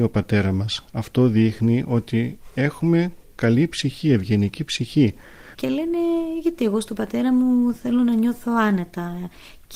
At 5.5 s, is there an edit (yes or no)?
yes